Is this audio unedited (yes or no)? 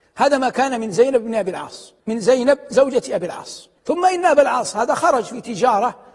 no